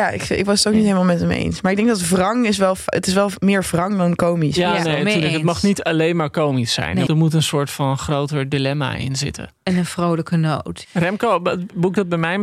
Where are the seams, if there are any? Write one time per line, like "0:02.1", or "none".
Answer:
0:07.1
0:10.8